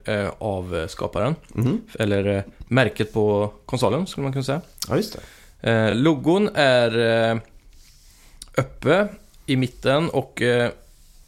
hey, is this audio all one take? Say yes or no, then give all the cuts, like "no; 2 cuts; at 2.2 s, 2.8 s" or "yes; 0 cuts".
yes; 0 cuts